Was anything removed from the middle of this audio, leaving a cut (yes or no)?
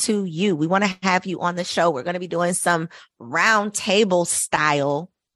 no